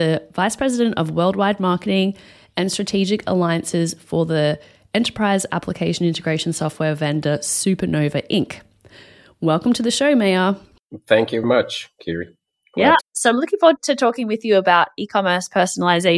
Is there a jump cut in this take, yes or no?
yes